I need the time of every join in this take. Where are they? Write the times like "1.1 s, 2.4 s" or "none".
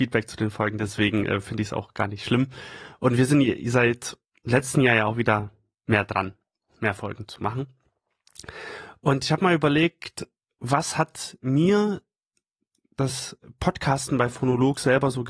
none